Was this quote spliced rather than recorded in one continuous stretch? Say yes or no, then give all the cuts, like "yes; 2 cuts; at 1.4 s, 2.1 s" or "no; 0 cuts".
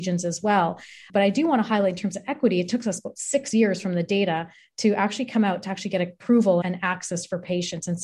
yes; 1 cut; at 6.6 s